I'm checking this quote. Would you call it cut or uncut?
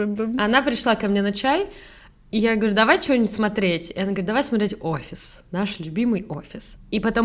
uncut